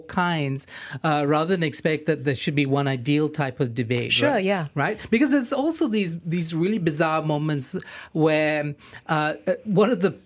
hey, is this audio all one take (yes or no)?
yes